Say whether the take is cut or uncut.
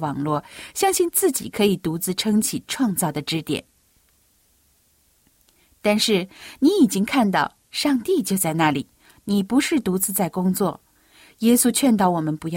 uncut